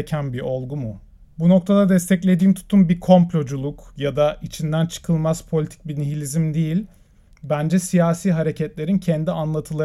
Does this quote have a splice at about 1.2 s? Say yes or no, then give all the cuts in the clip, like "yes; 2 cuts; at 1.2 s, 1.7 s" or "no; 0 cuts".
yes; 1 cut; at 1.2 s